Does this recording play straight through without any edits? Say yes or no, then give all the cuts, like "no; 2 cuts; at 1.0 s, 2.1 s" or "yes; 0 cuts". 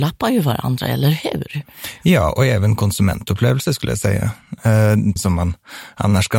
no; 1 cut; at 5.2 s